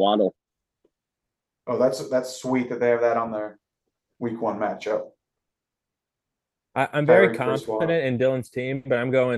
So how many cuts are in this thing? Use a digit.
0